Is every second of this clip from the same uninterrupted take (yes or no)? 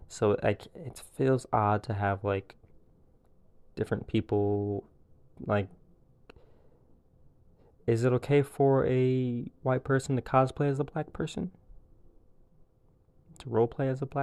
yes